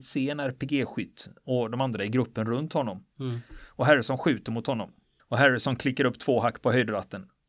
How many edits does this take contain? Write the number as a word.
one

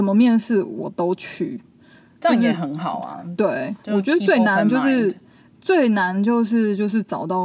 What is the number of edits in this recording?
zero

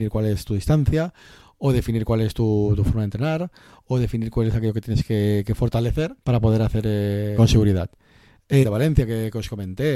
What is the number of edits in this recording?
three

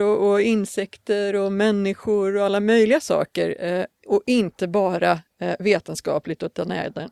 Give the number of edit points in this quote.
zero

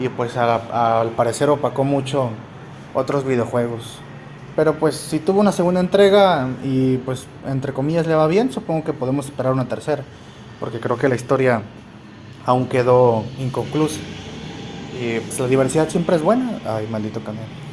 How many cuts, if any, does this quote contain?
one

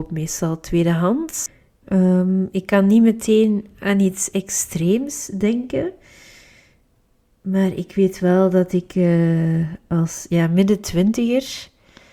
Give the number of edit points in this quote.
one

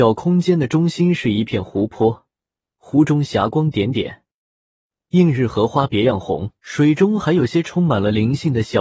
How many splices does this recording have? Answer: two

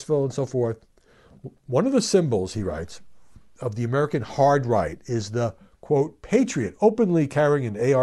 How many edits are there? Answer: zero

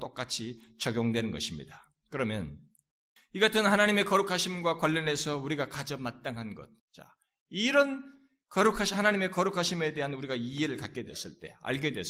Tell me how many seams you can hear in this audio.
one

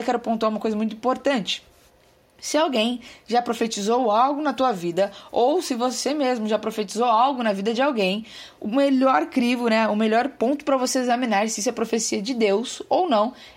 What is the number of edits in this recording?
one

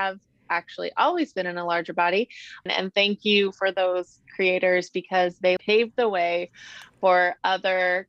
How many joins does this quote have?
two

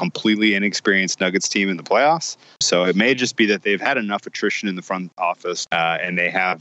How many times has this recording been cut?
two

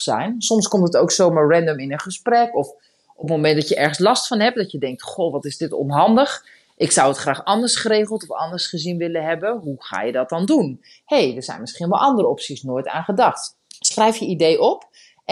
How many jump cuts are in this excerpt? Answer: one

